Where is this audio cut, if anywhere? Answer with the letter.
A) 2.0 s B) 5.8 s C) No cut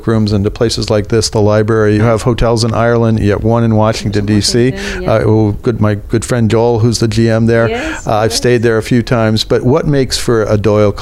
A